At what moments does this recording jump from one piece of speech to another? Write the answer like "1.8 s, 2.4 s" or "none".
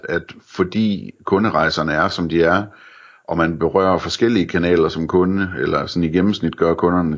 none